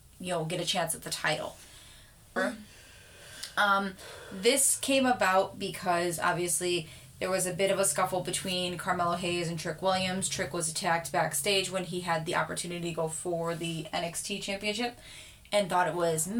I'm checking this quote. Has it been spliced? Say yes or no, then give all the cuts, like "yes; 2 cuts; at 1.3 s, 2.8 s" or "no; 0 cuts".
yes; 1 cut; at 2.4 s